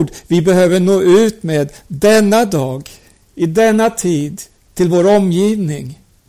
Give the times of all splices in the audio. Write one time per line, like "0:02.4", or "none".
none